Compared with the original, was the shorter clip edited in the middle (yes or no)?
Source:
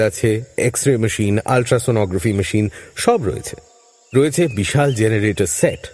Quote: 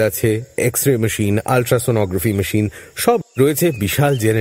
yes